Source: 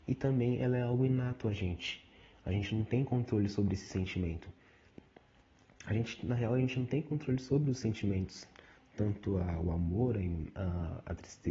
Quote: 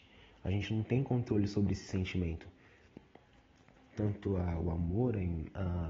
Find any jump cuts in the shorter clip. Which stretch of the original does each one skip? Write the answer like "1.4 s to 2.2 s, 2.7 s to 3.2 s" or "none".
5.8 s to 8.8 s

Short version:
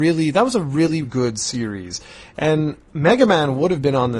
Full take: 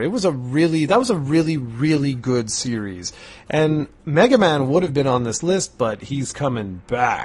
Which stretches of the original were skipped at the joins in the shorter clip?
1.6 s to 2.2 s

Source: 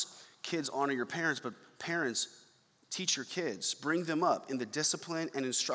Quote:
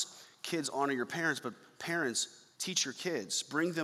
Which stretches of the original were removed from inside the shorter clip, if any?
2.5 s to 2.8 s

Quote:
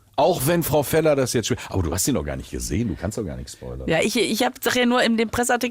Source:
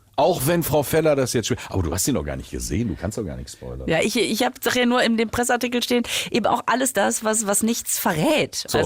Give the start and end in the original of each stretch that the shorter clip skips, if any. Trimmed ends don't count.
none

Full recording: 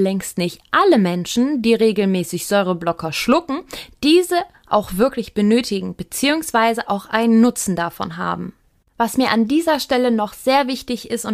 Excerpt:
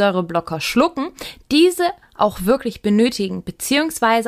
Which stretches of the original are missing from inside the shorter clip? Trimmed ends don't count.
none

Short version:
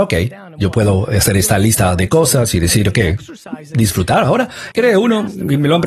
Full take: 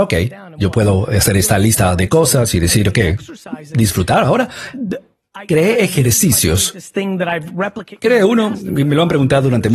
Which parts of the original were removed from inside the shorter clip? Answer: 4.7 s to 8.0 s

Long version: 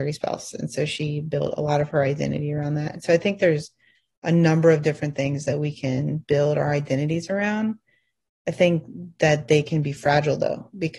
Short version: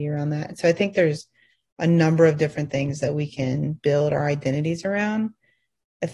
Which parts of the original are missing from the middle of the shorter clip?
none

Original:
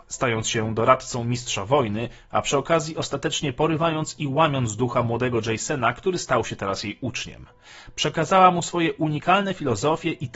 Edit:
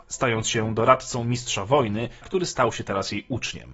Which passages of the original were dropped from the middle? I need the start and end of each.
2.2 s to 5.9 s

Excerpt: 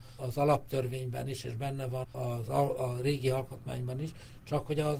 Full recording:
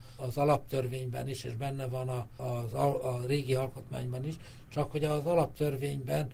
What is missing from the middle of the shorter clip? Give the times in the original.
2.0 s to 2.3 s

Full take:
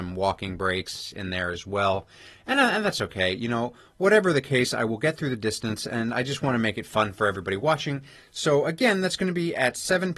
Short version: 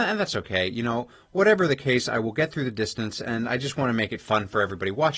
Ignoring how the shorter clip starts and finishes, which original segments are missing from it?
none

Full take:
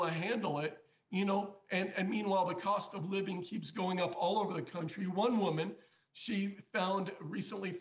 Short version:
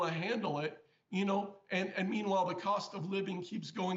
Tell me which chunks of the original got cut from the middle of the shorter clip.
none

